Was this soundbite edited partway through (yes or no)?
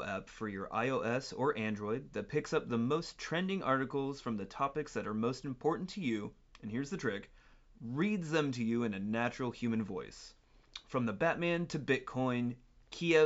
no